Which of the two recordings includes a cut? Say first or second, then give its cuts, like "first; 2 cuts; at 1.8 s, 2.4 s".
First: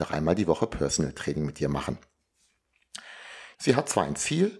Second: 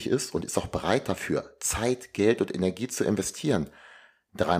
first; 1 cut; at 3.6 s